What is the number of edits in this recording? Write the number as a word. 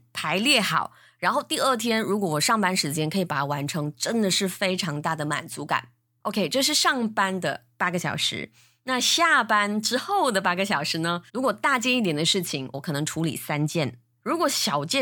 two